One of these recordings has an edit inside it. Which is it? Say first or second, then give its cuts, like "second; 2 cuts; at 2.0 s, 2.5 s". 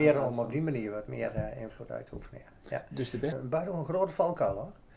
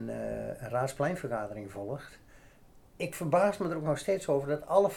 first; 1 cut; at 3.3 s